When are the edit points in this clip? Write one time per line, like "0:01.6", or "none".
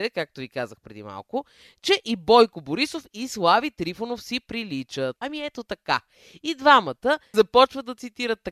0:05.2
0:07.3